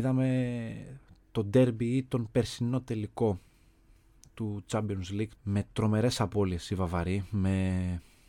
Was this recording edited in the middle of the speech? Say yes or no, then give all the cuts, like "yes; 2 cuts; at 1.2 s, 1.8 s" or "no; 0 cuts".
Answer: yes; 1 cut; at 5.3 s